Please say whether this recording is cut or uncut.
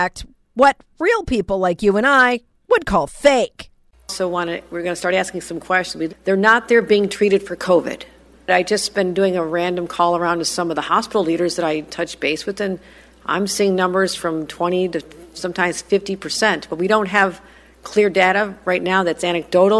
cut